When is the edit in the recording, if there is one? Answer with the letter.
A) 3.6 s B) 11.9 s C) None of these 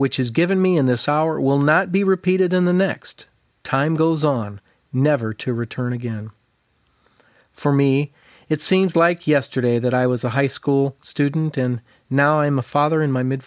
C